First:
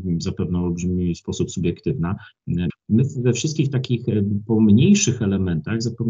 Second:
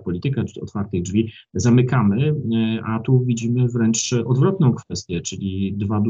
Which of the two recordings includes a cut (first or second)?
first